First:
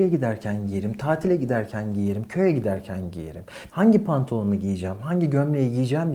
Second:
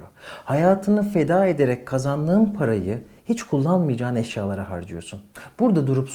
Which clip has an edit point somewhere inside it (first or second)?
first